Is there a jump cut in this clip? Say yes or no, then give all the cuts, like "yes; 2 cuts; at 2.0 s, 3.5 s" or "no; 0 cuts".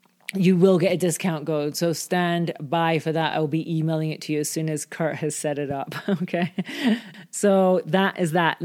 no; 0 cuts